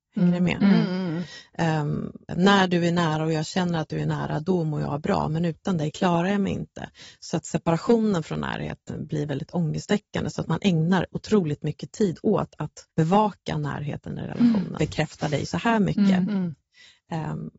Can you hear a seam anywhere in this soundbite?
yes; 3 cuts; at 2.3 s, 12.9 s, 14.8 s

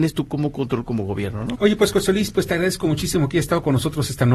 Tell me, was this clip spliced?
yes; 1 cut; at 1.5 s

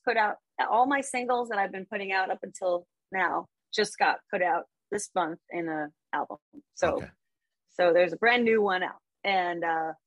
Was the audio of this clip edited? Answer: no; 0 cuts

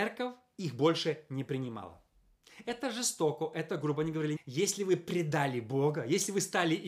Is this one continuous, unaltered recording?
no; 1 cut; at 4.4 s

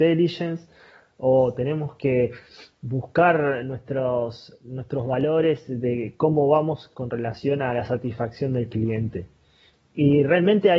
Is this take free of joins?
yes; 0 cuts

